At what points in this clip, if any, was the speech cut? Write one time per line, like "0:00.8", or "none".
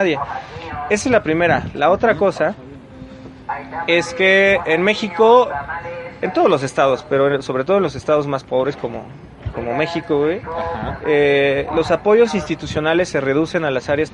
none